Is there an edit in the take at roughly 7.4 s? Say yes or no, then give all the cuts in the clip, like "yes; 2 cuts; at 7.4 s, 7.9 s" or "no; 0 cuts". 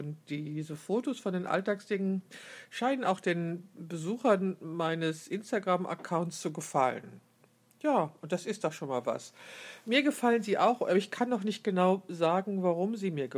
no; 0 cuts